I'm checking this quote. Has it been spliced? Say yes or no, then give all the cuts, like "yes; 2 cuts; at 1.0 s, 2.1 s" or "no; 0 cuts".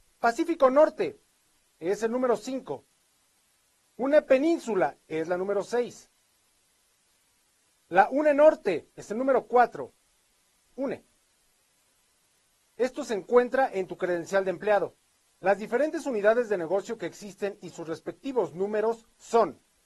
yes; 1 cut; at 10.6 s